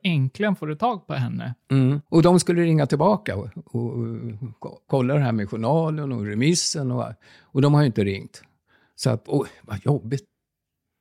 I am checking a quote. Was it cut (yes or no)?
yes